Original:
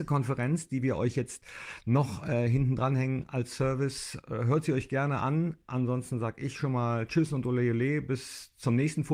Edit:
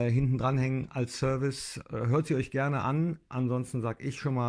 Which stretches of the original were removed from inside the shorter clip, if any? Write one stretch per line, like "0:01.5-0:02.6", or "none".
none